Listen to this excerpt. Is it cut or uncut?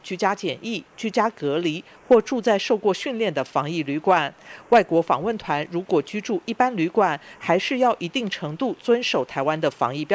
uncut